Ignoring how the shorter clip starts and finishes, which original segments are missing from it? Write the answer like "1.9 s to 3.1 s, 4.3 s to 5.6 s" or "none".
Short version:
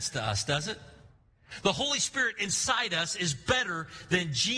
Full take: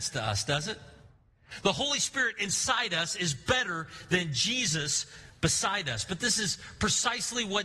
none